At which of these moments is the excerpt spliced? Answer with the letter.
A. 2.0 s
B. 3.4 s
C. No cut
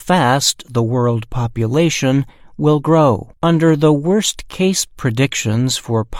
B